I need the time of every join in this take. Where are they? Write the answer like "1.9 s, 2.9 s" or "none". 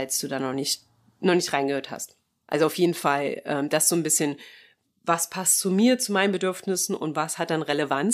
none